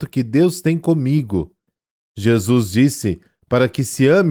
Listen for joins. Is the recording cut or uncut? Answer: uncut